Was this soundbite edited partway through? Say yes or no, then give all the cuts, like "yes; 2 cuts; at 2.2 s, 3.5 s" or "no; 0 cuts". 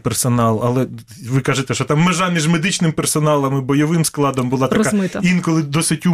no; 0 cuts